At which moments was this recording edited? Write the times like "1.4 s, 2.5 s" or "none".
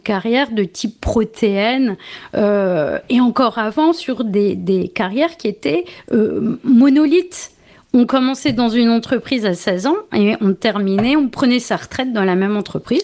none

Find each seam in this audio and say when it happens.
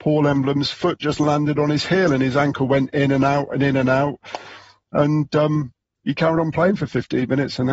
none

